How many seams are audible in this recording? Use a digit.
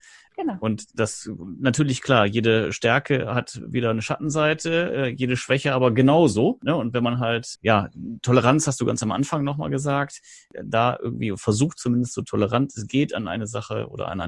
0